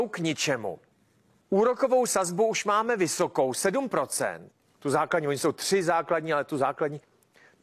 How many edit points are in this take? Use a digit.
0